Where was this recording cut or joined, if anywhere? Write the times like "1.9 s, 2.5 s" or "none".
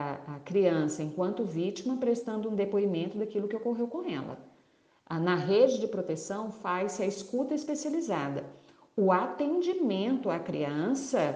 none